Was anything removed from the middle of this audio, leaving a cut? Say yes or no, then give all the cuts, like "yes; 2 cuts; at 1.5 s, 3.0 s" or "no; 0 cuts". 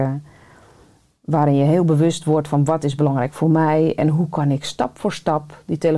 no; 0 cuts